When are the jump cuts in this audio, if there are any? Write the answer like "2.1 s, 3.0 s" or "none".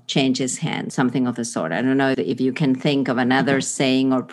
0.9 s, 2.1 s